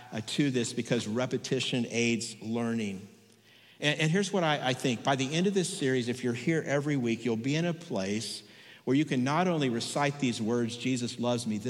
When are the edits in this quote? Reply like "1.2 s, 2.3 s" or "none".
none